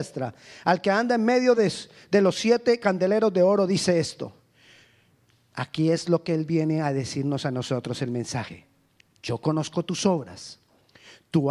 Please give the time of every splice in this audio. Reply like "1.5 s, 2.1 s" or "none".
none